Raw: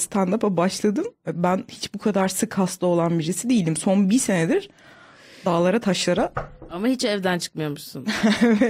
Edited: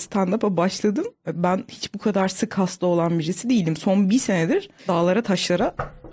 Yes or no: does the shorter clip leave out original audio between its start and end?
yes